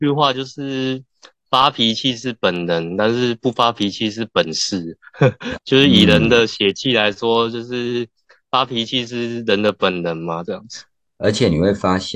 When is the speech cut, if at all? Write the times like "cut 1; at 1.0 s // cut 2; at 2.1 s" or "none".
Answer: cut 1; at 5.5 s // cut 2; at 10.4 s